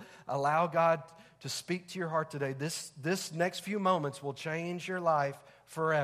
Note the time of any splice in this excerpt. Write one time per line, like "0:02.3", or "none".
none